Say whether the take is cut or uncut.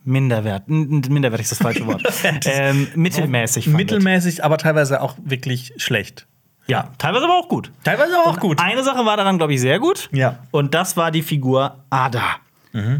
uncut